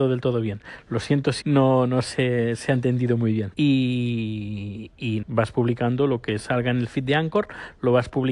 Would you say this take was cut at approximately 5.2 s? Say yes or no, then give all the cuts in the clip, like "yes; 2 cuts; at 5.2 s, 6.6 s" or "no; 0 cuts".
yes; 3 cuts; at 1.4 s, 3.5 s, 5.2 s